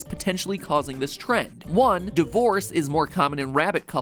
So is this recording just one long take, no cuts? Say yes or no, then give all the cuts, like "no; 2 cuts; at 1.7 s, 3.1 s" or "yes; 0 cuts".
yes; 0 cuts